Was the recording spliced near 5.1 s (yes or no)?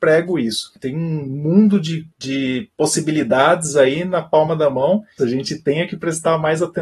yes